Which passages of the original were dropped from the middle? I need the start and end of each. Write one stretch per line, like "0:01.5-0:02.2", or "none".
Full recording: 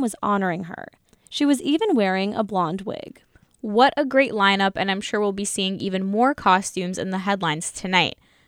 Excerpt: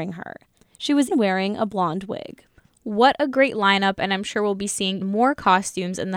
0:01.6-0:01.9
0:05.8-0:06.0